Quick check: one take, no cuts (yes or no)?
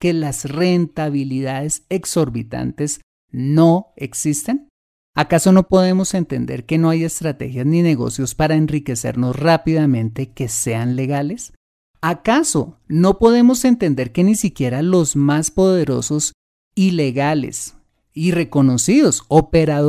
yes